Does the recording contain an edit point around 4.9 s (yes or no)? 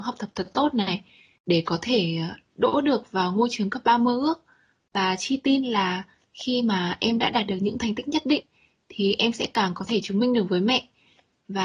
no